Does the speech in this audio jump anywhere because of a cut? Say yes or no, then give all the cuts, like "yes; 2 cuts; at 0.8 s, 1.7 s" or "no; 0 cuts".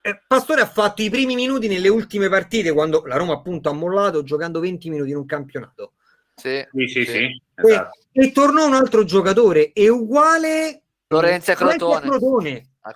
yes; 2 cuts; at 6.4 s, 11.1 s